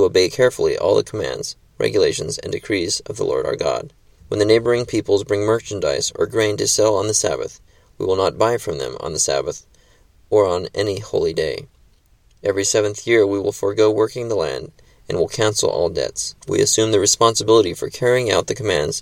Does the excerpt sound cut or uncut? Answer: cut